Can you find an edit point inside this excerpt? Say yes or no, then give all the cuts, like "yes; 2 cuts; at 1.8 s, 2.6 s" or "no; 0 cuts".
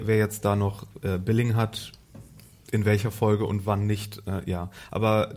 no; 0 cuts